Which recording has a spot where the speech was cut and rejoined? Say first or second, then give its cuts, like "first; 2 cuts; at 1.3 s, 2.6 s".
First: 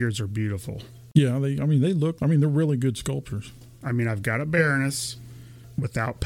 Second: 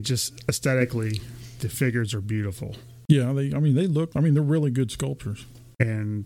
first; 1 cut; at 3.8 s